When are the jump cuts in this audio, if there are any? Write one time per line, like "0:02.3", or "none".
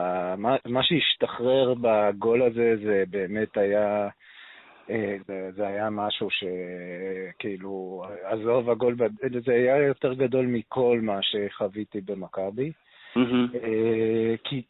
0:05.2